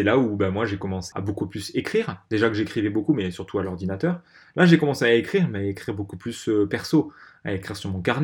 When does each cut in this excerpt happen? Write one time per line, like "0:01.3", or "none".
0:01.1